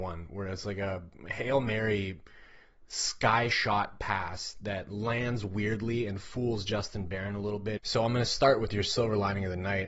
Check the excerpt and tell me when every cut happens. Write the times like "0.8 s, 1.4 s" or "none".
7.8 s

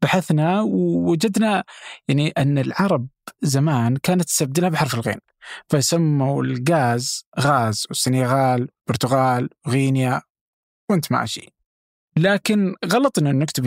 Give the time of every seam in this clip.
none

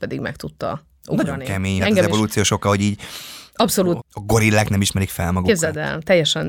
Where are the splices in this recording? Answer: 1.8 s, 4.0 s

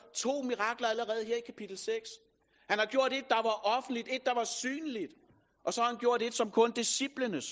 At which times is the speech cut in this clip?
none

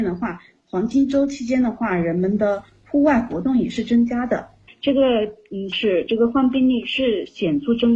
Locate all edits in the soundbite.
4.7 s, 5.7 s

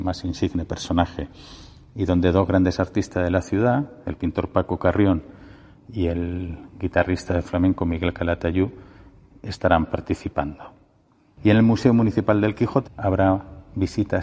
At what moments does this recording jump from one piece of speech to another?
11.4 s, 12.9 s

